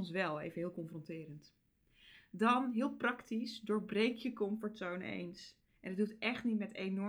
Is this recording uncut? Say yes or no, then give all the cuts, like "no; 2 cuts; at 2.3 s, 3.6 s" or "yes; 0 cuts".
yes; 0 cuts